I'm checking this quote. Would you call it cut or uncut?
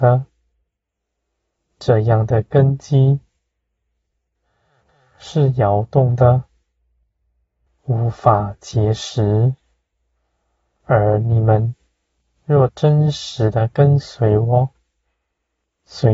cut